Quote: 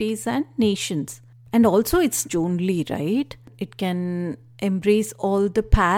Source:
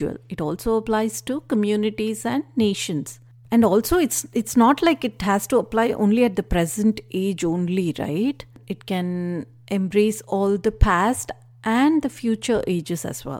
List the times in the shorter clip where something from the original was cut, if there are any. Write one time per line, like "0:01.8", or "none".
0:02.3